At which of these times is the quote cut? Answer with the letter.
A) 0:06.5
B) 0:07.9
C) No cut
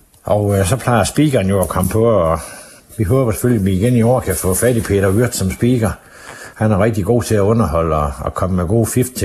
C